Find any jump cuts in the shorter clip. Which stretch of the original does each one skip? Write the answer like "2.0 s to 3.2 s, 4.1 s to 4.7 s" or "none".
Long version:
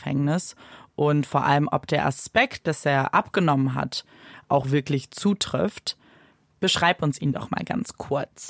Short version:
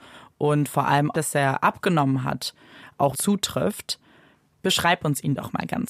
1.7 s to 2.6 s, 4.6 s to 5.1 s